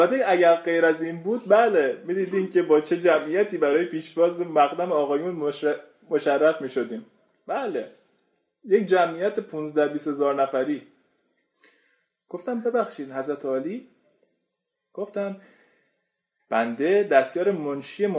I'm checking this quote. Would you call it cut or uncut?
uncut